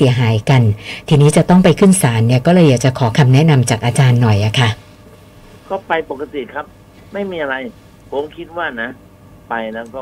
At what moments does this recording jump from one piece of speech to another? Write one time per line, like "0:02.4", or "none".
none